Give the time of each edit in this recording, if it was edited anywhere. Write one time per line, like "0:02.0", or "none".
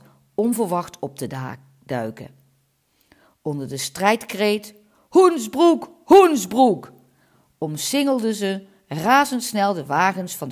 none